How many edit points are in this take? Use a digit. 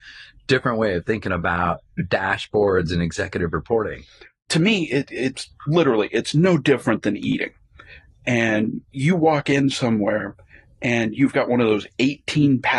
0